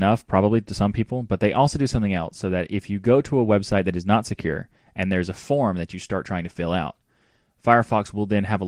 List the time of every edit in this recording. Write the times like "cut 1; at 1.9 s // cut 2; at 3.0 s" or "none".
none